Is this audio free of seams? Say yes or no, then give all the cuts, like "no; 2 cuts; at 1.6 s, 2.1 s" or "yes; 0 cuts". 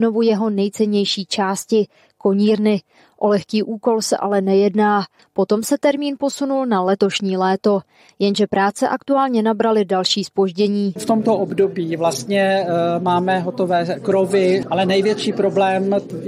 no; 2 cuts; at 5.2 s, 14.6 s